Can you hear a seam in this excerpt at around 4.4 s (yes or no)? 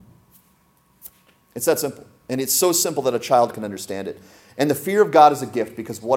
no